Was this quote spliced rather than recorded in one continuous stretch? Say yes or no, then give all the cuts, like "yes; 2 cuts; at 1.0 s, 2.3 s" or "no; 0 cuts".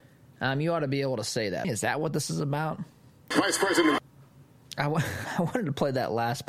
yes; 2 cuts; at 1.6 s, 3.3 s